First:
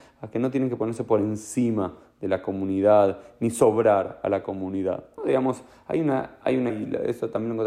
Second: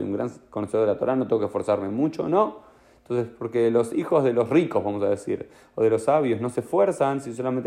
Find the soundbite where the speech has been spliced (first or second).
first